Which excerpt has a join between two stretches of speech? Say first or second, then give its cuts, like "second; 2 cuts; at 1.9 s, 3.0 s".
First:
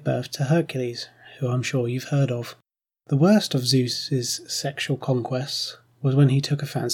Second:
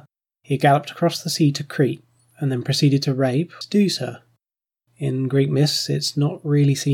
second; 1 cut; at 3.6 s